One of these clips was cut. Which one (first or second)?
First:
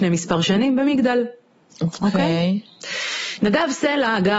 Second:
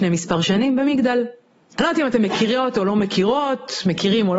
second